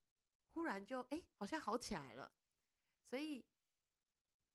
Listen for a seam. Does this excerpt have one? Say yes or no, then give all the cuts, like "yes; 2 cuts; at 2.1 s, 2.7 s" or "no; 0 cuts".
yes; 1 cut; at 1.3 s